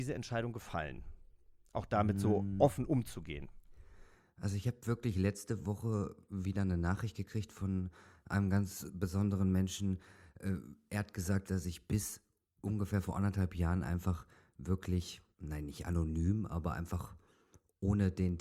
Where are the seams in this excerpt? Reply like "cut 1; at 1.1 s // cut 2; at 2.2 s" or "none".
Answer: cut 1; at 11.4 s // cut 2; at 15.3 s